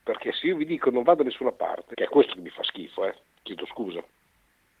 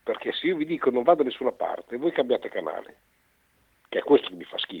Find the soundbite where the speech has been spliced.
first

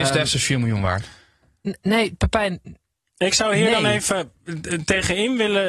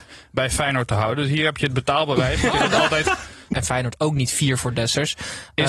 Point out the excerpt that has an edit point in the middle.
second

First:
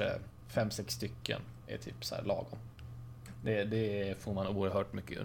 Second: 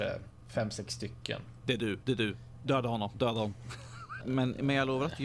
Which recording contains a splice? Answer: second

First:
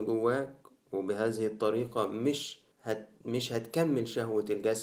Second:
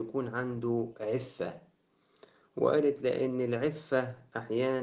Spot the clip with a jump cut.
first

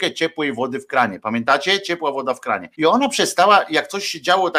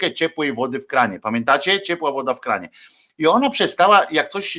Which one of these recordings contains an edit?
first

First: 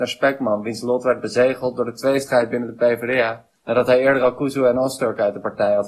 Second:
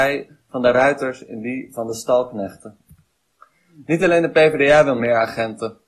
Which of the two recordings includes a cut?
first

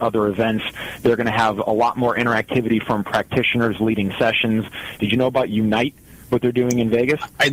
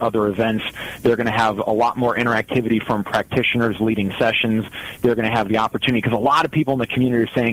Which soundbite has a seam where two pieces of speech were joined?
first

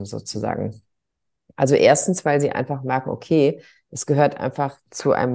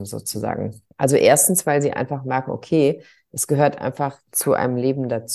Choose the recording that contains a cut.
second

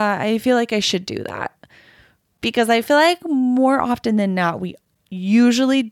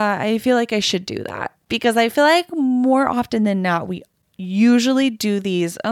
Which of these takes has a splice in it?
second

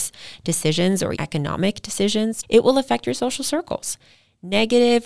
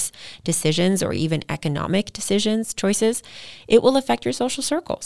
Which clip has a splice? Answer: first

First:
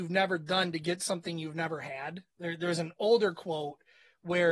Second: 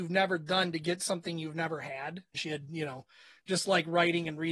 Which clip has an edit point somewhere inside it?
second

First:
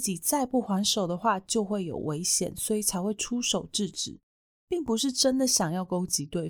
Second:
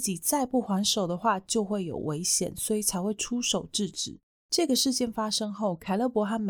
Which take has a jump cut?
second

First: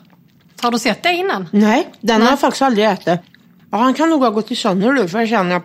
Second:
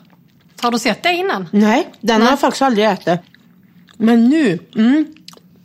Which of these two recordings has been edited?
first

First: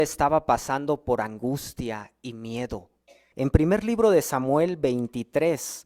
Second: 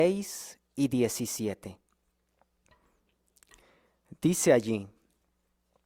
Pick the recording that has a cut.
first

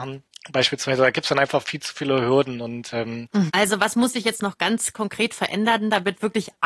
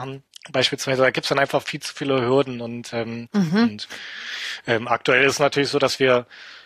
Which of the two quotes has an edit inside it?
first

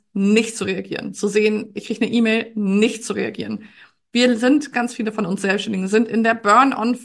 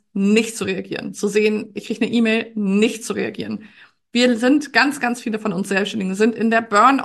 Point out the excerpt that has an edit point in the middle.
first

